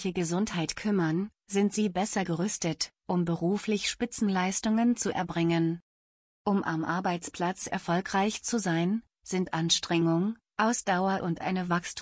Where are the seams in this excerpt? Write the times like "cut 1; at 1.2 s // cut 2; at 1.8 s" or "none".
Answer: none